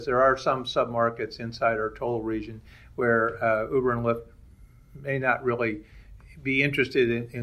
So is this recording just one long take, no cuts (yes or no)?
yes